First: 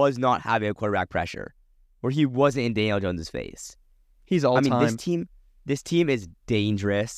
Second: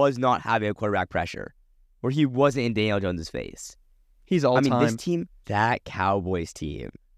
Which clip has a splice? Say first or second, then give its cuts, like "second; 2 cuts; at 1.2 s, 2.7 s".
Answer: second; 1 cut; at 5.4 s